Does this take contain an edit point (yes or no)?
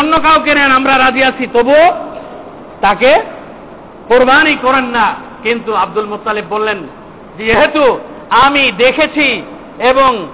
no